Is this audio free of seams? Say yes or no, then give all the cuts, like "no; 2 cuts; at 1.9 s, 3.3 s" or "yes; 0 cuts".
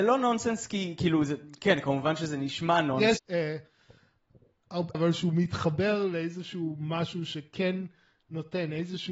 no; 2 cuts; at 3.2 s, 4.9 s